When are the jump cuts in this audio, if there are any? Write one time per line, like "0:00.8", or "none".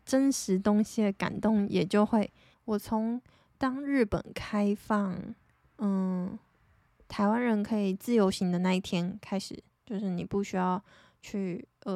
0:02.5